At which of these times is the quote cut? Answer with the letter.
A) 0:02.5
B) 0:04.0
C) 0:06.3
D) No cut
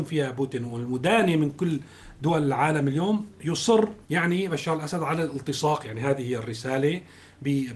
B